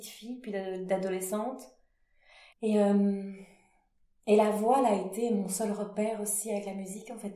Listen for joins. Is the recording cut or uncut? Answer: cut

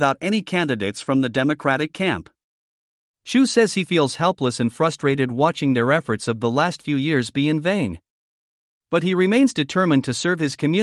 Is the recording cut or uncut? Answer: uncut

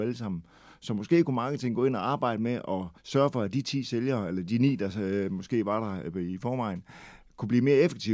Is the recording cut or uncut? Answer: cut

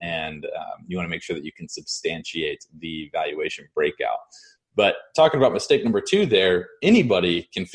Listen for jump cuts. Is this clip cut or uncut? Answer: uncut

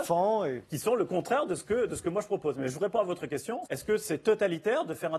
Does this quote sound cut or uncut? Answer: cut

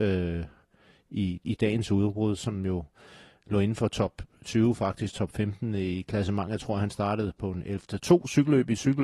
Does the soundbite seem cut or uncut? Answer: cut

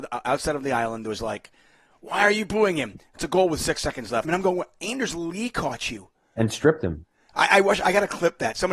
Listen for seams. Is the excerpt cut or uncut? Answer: cut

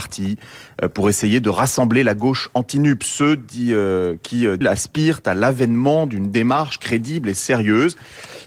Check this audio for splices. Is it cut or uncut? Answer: cut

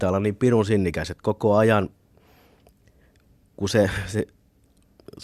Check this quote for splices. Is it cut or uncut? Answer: uncut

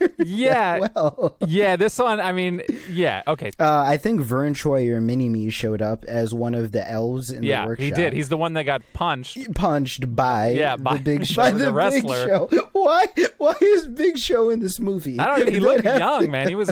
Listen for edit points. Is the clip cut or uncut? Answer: cut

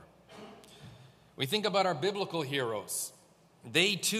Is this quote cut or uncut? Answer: uncut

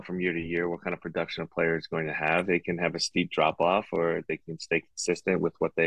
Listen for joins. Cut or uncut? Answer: uncut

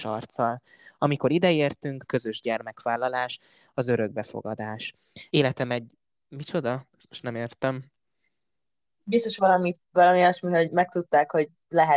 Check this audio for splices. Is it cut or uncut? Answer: cut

